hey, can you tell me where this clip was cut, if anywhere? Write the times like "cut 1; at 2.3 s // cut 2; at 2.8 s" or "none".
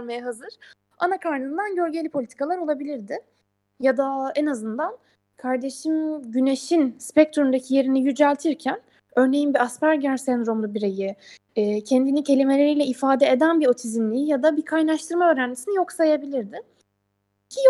none